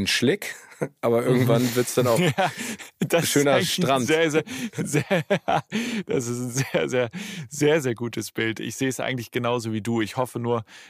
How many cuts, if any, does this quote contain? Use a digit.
0